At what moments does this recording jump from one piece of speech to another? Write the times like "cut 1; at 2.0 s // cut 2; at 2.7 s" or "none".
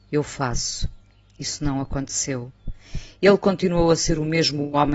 none